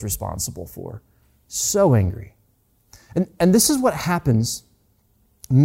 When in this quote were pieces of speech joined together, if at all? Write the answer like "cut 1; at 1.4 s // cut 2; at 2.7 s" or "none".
none